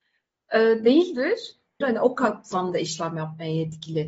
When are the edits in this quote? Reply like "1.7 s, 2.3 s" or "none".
1.8 s